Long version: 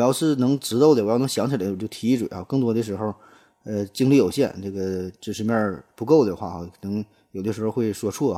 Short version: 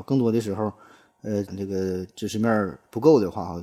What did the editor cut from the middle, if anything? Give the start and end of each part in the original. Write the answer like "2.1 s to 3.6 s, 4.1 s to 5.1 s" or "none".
3.9 s to 4.5 s